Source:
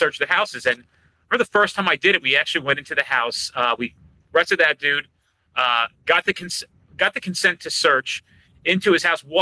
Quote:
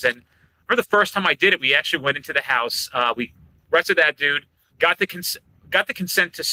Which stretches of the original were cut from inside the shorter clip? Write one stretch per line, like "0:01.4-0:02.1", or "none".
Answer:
0:05.3-0:06.0